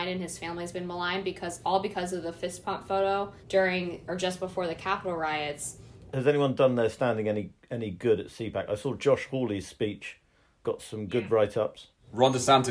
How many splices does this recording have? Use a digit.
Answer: 2